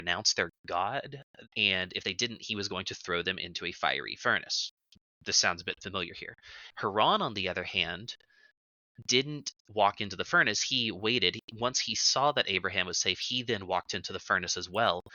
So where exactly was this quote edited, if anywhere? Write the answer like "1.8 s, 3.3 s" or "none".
1.5 s, 6.7 s